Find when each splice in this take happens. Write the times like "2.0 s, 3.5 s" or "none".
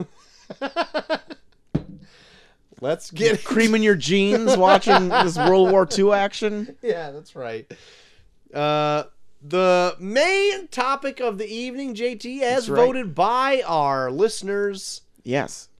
none